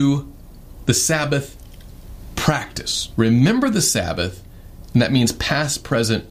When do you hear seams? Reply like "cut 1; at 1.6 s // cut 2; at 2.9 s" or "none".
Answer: cut 1; at 3.1 s